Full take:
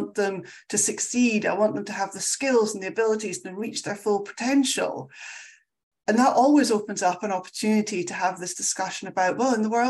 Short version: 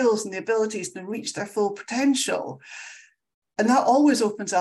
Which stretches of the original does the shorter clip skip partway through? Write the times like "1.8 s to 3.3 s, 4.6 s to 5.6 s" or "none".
none